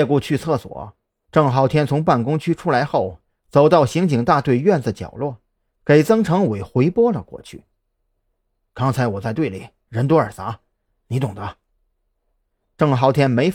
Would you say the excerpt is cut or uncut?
uncut